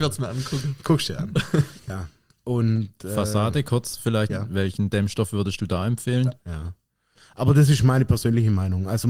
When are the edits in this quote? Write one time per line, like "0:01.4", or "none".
0:04.3
0:06.4